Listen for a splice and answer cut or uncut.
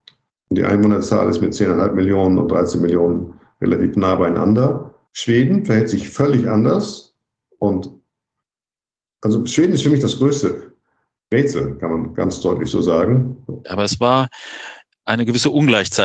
cut